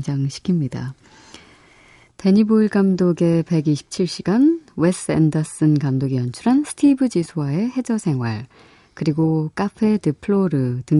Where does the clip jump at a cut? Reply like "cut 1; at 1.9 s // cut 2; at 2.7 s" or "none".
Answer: none